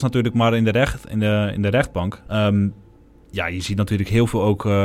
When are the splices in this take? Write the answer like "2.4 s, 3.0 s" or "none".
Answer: 2.2 s